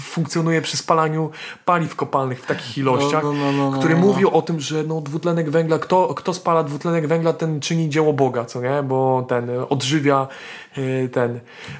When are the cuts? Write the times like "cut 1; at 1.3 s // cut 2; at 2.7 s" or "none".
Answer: none